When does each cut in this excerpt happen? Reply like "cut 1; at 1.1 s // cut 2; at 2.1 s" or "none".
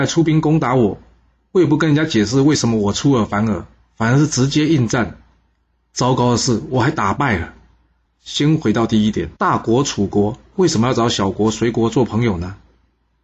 cut 1; at 8.0 s // cut 2; at 9.4 s

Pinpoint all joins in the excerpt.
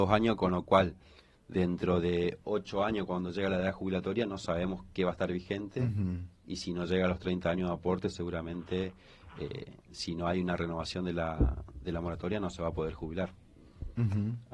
none

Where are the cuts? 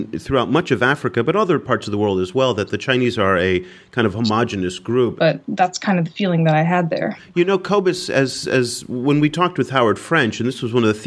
cut 1; at 5.2 s

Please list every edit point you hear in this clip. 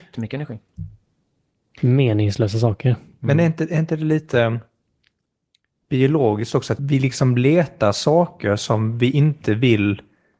cut 1; at 6.8 s

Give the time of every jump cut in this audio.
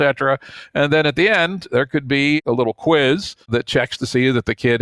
cut 1; at 3.4 s

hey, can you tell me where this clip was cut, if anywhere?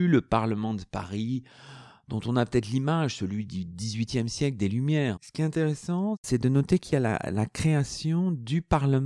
cut 1; at 5.2 s

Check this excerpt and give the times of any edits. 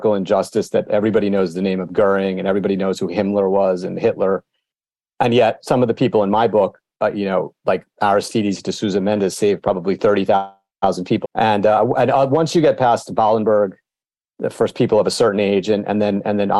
cut 1; at 11.2 s

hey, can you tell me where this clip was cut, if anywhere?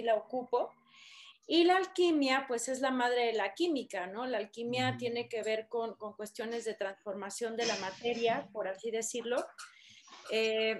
cut 1; at 1.3 s

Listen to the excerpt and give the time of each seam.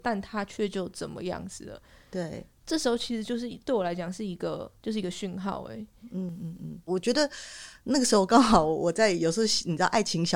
cut 1; at 4.8 s // cut 2; at 6.9 s

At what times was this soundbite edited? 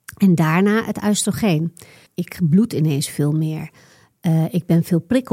cut 1; at 2.1 s

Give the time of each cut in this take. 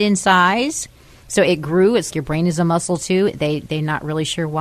cut 1; at 2.1 s

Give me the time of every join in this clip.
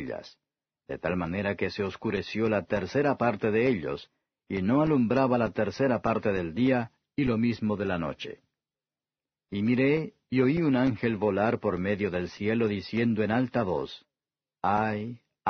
none

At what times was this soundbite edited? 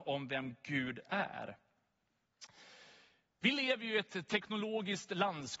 none

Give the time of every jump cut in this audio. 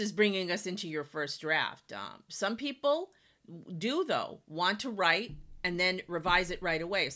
none

